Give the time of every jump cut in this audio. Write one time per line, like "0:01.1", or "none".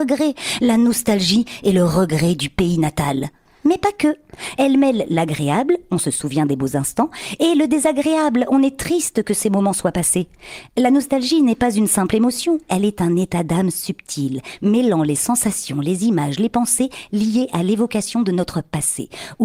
0:04.6